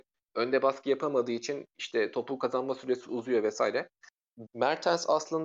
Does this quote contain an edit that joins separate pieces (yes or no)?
yes